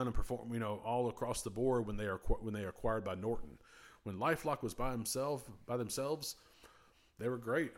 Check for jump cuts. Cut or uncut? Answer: uncut